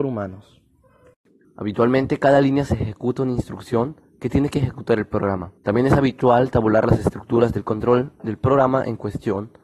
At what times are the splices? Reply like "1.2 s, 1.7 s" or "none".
1.4 s, 5.6 s